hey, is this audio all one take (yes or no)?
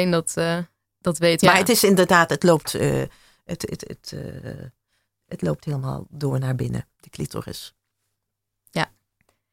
no